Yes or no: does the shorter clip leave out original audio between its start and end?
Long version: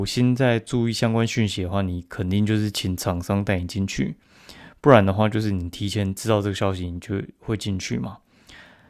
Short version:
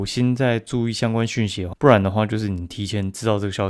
yes